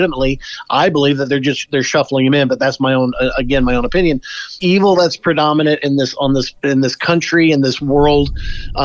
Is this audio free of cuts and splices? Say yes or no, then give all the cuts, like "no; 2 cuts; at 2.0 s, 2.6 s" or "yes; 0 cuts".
no; 1 cut; at 4.6 s